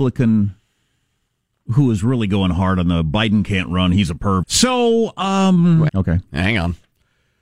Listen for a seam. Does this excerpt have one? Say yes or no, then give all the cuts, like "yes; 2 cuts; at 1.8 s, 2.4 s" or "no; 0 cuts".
yes; 2 cuts; at 4.4 s, 5.9 s